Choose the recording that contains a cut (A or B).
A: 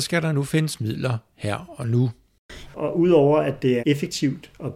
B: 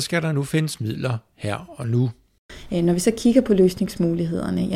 A